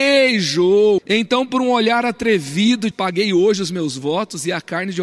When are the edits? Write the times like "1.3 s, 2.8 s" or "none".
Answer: 1.0 s, 2.9 s

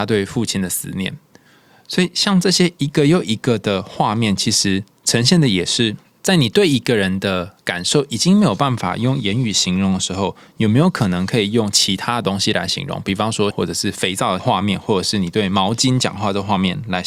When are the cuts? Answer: 13.5 s

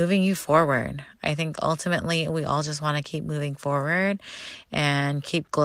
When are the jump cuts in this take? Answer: none

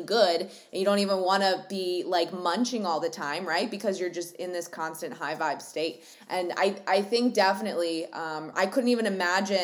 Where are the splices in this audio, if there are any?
8.5 s

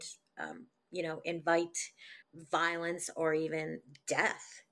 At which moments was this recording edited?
2.2 s

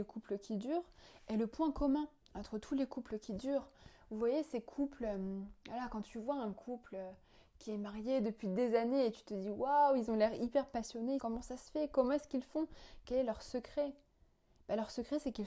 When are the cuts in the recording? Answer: 11.2 s

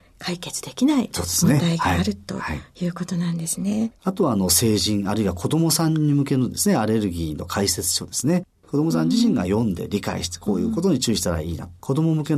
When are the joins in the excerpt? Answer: 4.0 s

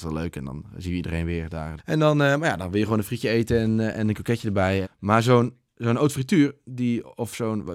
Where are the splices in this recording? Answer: 1.8 s, 4.8 s

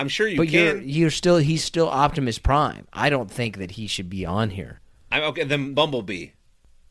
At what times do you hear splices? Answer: 5.7 s

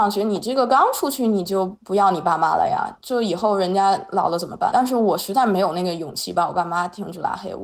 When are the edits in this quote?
4.7 s

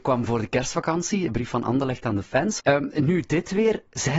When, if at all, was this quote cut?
2.6 s

